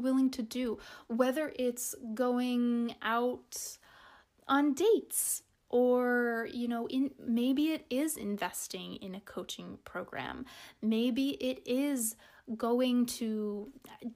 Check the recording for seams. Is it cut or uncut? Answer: uncut